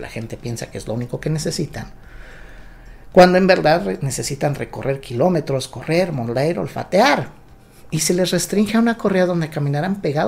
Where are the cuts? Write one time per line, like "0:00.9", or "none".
none